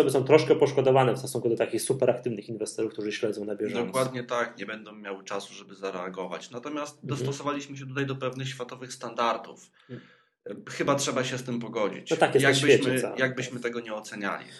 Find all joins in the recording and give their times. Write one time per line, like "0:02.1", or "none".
none